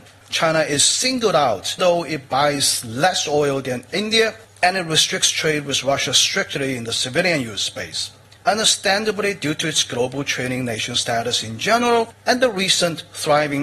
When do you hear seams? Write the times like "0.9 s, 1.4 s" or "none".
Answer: 1.8 s, 8.4 s